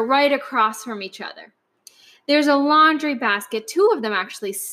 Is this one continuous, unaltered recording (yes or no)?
yes